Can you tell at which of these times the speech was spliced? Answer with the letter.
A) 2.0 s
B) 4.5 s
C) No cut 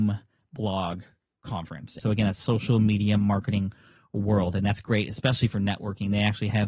A